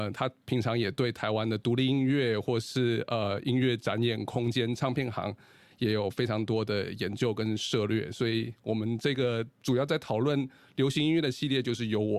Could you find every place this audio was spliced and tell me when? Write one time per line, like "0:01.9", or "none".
none